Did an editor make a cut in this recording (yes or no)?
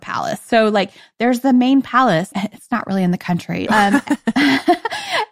yes